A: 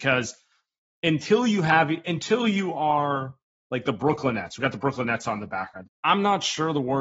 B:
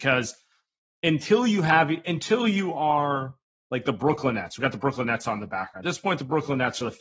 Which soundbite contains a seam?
A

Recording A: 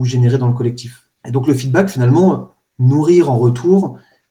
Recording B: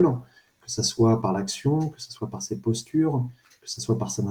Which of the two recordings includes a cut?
A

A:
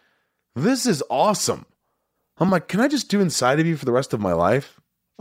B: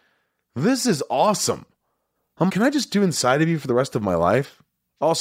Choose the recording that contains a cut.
B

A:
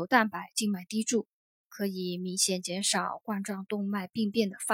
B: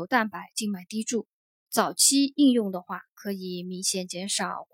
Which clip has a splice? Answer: A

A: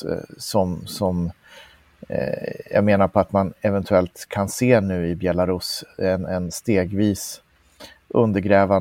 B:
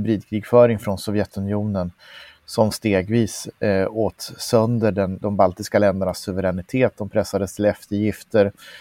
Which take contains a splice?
B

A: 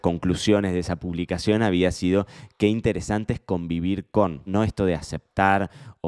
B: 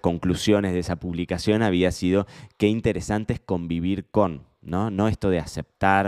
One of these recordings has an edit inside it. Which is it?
A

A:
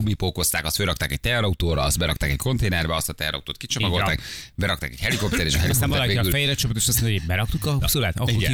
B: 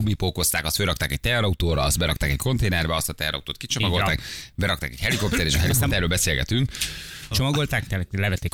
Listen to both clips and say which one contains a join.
B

